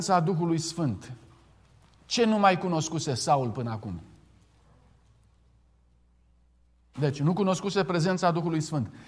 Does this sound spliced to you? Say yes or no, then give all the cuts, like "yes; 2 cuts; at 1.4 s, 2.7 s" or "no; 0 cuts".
no; 0 cuts